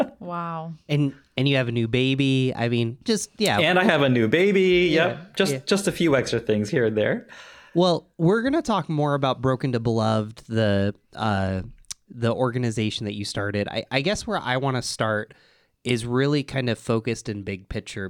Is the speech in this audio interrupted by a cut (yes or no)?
no